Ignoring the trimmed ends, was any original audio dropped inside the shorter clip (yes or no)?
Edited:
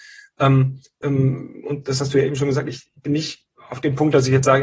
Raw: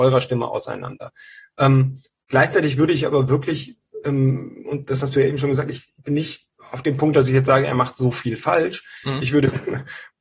yes